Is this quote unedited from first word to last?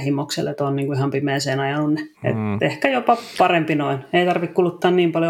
no; 1 cut; at 2.1 s

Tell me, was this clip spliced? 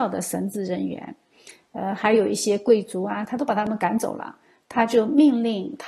yes; 1 cut; at 3.2 s

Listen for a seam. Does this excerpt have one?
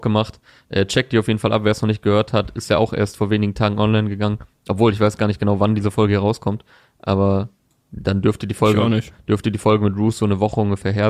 no; 0 cuts

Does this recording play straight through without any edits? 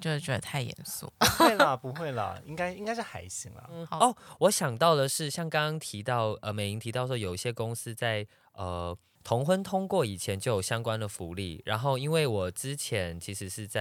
yes; 0 cuts

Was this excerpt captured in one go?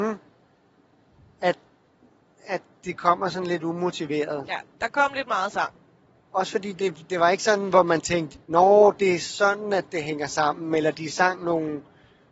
no; 2 cuts; at 6.2 s, 8.4 s

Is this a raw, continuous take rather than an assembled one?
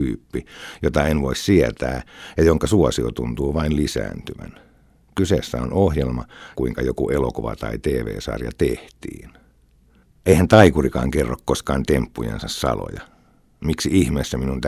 no; 1 cut; at 6.5 s

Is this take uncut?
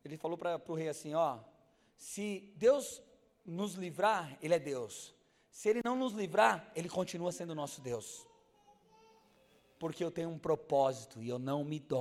yes; 0 cuts

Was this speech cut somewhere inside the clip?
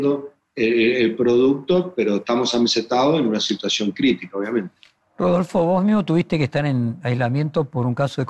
no; 0 cuts

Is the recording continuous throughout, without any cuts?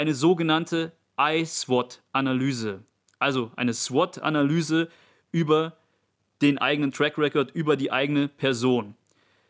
yes; 0 cuts

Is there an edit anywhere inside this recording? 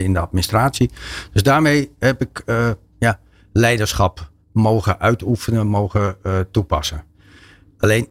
no; 0 cuts

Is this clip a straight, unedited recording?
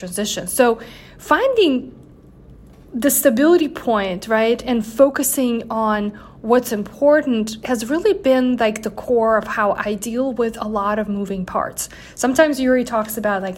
yes; 0 cuts

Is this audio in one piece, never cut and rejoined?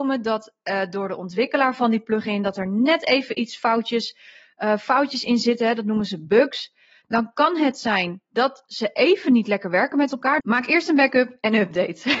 no; 2 cuts; at 7.0 s, 10.4 s

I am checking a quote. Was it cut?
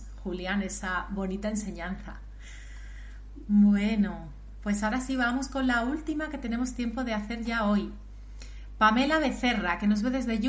no; 0 cuts

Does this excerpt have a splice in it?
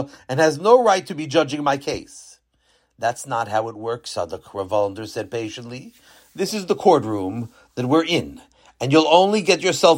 no; 0 cuts

